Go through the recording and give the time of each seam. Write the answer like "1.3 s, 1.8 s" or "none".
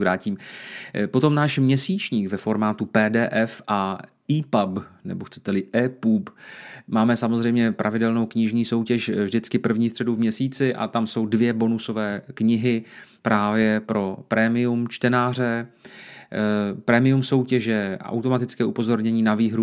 none